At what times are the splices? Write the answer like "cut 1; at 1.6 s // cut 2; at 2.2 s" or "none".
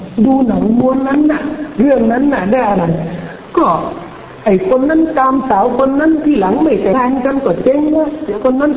cut 1; at 6.9 s